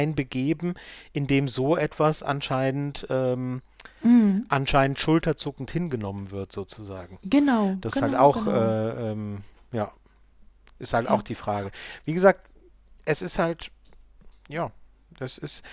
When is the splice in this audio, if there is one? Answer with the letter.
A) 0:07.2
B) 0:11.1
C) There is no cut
C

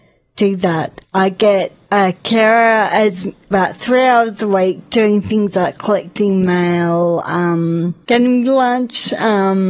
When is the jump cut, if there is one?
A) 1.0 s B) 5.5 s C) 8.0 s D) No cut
A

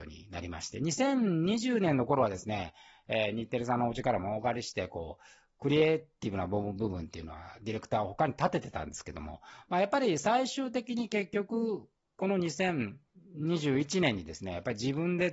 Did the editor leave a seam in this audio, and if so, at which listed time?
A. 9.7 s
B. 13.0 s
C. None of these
C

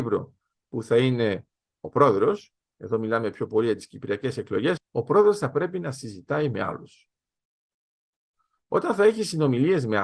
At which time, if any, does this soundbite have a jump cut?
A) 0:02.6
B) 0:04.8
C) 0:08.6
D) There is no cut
B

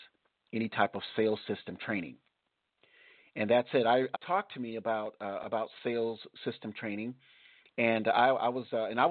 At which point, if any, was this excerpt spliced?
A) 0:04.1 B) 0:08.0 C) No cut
A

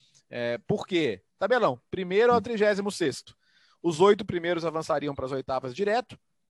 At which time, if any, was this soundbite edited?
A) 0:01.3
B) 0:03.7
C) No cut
A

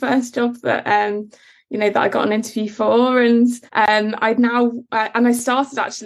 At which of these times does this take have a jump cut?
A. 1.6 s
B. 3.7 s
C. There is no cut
B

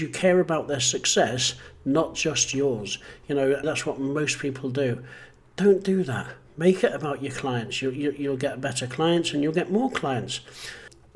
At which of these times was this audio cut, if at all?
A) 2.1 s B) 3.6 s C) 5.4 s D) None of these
B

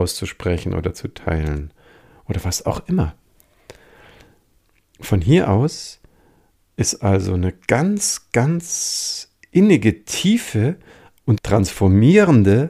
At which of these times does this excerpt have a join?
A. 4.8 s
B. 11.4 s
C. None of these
B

